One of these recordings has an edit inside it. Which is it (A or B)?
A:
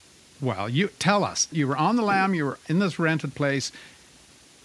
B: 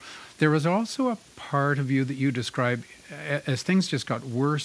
A